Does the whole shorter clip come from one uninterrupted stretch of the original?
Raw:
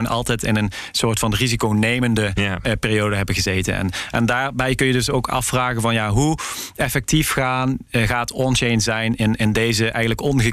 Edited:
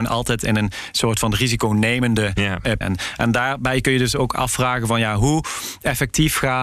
no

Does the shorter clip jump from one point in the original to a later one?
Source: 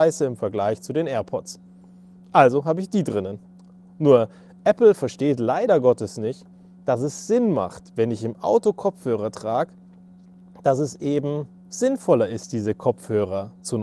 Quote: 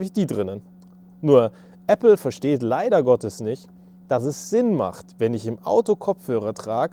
no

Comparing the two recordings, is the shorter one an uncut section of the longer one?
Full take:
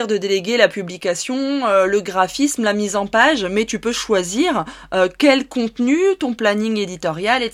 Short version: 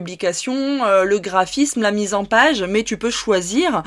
yes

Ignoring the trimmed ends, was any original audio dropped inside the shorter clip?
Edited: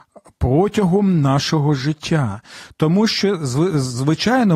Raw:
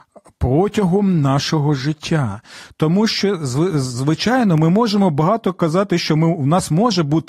no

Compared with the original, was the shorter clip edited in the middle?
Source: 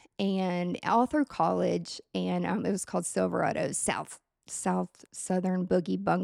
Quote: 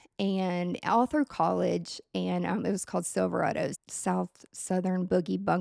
yes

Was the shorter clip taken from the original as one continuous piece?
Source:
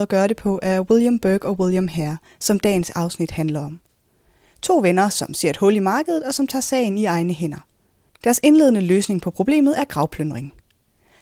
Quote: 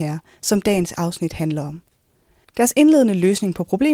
no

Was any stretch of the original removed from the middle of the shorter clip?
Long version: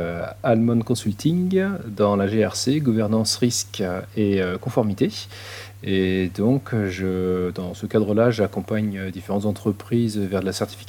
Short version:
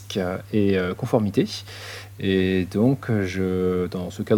no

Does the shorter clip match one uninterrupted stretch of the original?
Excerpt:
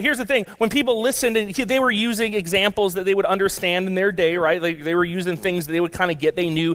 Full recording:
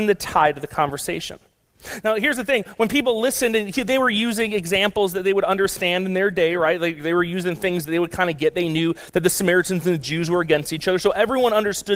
yes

